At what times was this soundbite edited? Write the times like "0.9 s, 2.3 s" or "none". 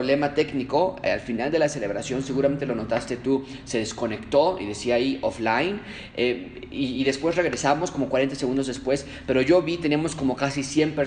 none